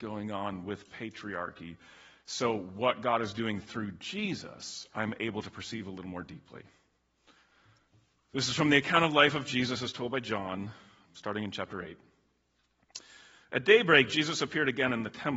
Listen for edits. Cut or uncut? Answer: cut